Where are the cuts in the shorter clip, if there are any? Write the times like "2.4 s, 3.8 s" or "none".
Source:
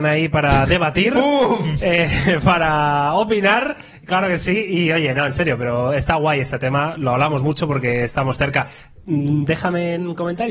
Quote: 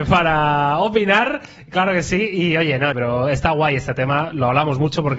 2.9 s

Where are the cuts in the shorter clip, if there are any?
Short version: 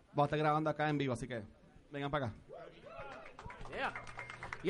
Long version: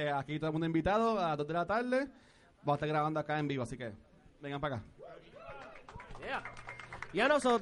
none

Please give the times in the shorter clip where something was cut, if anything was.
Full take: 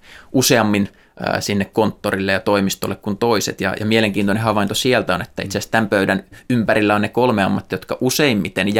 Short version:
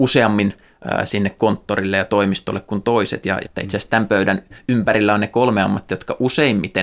3.4 s

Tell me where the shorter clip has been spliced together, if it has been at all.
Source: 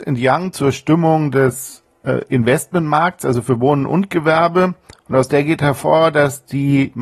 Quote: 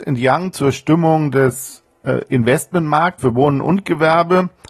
3.2 s

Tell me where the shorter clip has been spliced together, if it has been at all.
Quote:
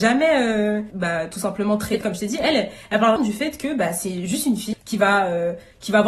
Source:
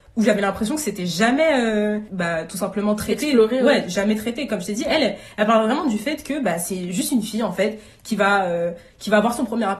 2.0 s, 3.2 s, 4.7 s

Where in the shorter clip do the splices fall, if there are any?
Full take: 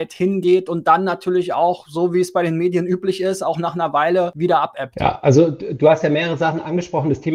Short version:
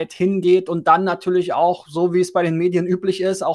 none

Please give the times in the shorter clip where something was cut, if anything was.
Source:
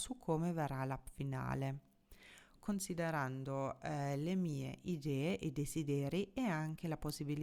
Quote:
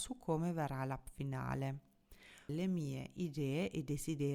2.5 s

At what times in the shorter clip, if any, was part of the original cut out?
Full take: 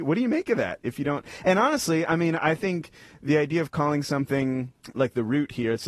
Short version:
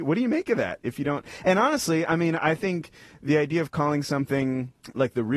none

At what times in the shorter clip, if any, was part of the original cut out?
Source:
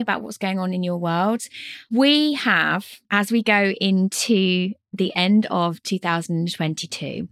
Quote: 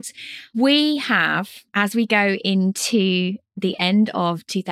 none

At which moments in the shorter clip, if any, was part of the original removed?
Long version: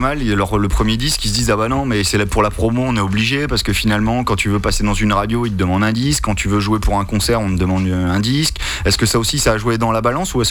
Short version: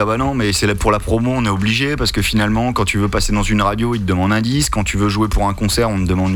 none

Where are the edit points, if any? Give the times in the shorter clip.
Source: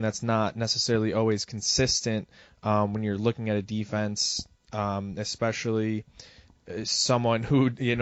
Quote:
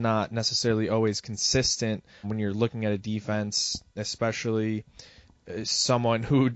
2.2 s, 4.0 s

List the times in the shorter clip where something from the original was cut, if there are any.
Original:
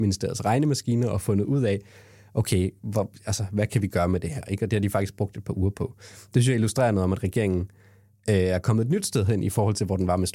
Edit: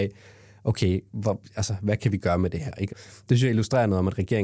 2.9 s

